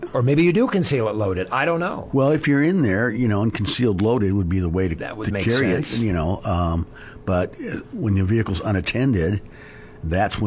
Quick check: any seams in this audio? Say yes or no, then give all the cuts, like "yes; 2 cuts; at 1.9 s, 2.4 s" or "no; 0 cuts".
no; 0 cuts